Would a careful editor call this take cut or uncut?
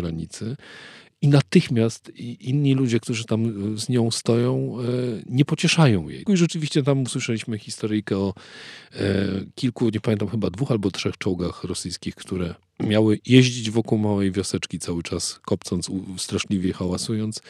cut